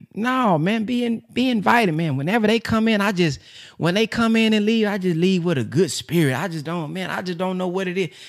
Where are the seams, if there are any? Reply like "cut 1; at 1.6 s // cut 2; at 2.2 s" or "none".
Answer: none